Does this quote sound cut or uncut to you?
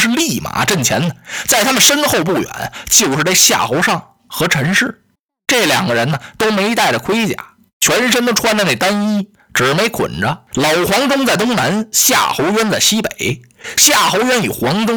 cut